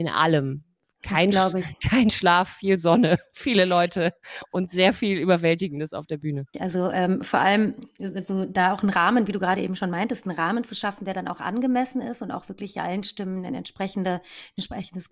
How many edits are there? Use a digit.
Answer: 1